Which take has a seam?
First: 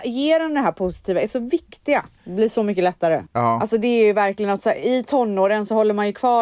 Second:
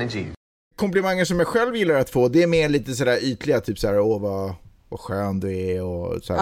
first; 2 cuts; at 2.2 s, 3.3 s

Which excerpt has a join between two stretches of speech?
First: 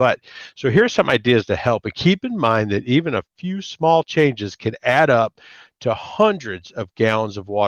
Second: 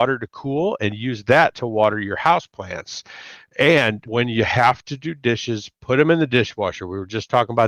second; 1 cut; at 4.1 s

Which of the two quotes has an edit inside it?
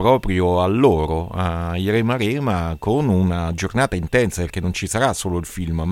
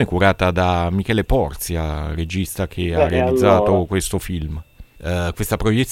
second; 1 cut; at 5.0 s

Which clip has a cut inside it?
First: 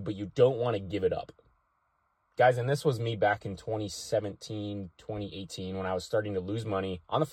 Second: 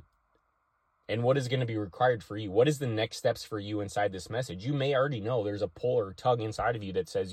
second; 1 cut; at 0.9 s

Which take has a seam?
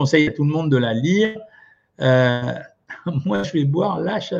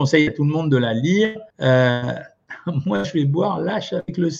second; 1 cut; at 1.5 s

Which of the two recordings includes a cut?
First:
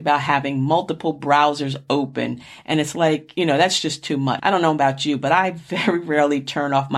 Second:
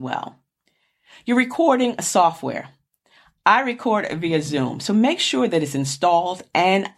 first; 1 cut; at 4.4 s

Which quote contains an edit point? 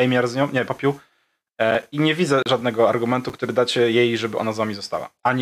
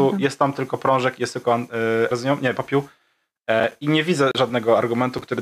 second; 1 cut; at 2.1 s

